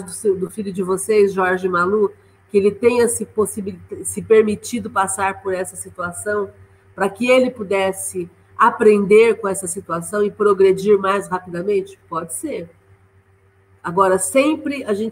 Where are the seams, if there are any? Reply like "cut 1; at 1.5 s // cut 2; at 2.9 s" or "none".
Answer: none